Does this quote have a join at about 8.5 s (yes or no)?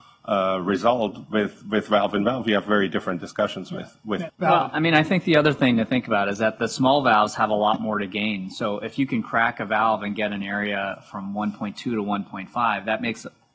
no